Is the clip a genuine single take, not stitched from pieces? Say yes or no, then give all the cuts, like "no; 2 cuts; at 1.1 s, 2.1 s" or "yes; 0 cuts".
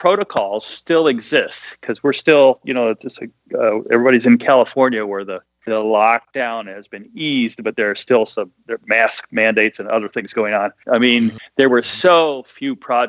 no; 1 cut; at 10.8 s